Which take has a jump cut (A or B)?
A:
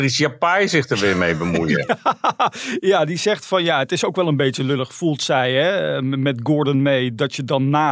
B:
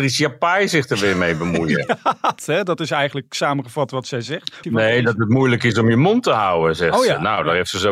B